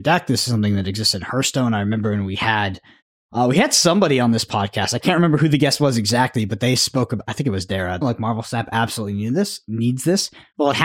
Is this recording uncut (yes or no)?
no